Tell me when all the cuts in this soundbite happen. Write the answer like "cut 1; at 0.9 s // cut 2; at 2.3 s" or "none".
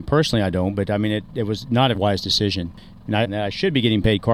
cut 1; at 1.9 s // cut 2; at 3.2 s

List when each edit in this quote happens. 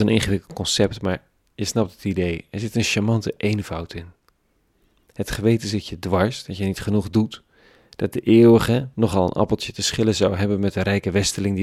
cut 1; at 8.9 s

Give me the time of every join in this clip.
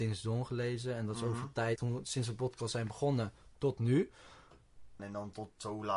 cut 1; at 1.8 s // cut 2; at 5.0 s

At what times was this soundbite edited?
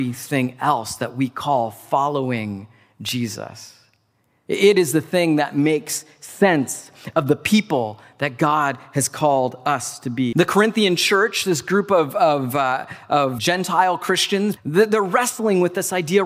cut 1; at 10.3 s // cut 2; at 13.4 s // cut 3; at 14.6 s

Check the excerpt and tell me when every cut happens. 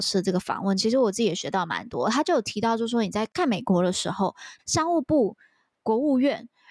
cut 1; at 4.6 s

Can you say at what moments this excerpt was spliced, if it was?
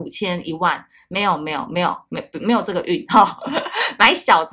none

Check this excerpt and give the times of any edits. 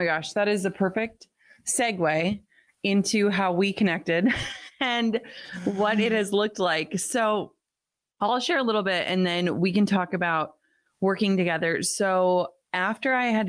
none

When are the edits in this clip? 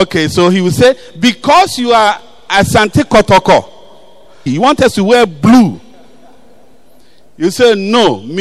cut 1; at 4.5 s

